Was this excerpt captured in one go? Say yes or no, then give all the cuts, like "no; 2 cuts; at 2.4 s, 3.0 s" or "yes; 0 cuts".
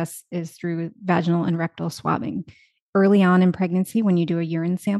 yes; 0 cuts